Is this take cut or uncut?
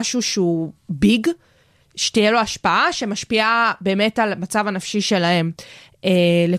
uncut